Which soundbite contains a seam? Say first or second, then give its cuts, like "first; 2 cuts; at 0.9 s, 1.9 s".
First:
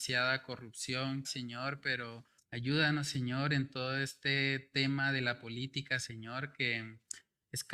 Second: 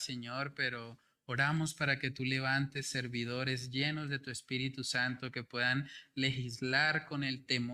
first; 2 cuts; at 1.2 s, 2.4 s